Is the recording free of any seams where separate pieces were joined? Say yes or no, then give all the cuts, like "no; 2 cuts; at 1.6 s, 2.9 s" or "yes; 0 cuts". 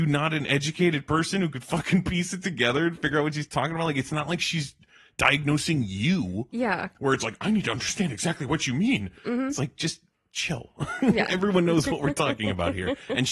yes; 0 cuts